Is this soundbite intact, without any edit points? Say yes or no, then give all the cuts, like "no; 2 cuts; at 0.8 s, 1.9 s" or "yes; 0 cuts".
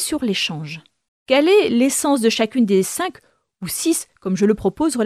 no; 1 cut; at 1.1 s